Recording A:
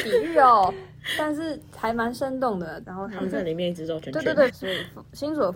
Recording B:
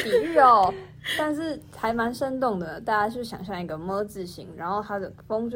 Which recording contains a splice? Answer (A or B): A